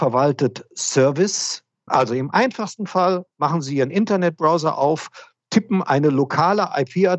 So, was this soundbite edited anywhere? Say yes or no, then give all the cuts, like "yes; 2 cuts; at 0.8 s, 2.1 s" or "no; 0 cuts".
yes; 1 cut; at 1.9 s